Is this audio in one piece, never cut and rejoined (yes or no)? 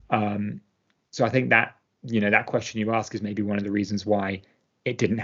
yes